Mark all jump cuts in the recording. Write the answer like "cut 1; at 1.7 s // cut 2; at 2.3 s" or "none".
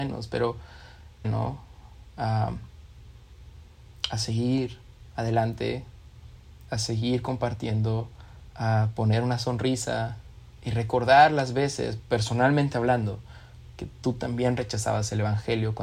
cut 1; at 1.2 s // cut 2; at 8.5 s